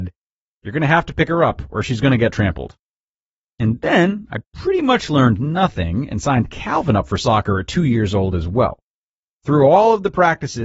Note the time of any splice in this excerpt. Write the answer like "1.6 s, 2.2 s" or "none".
3.4 s